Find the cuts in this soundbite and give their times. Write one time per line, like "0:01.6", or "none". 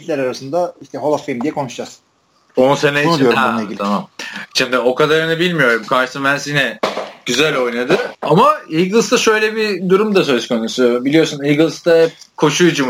0:08.1